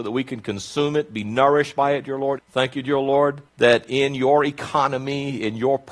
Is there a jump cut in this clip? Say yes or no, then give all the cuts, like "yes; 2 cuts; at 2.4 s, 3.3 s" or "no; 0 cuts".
yes; 2 cuts; at 2.4 s, 3.5 s